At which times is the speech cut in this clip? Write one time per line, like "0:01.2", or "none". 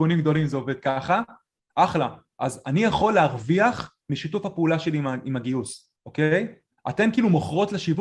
0:06.0